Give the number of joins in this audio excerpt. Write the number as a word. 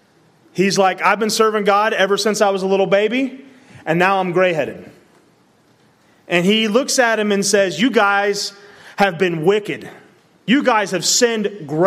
one